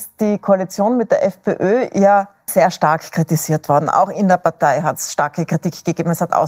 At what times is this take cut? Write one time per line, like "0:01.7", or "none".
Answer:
0:02.5